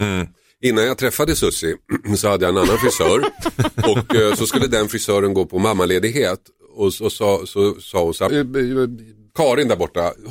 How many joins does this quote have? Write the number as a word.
one